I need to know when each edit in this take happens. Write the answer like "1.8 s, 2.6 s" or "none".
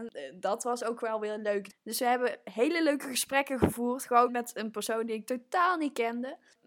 4.3 s